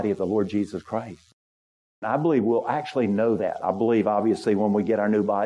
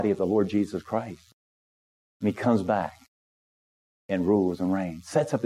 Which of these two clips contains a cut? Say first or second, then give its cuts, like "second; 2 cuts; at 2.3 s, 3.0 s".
first; 1 cut; at 2.0 s